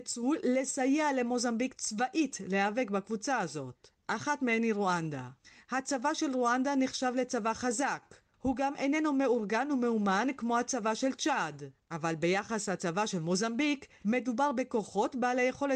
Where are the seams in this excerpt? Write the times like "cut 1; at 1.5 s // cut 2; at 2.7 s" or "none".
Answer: cut 1; at 8.3 s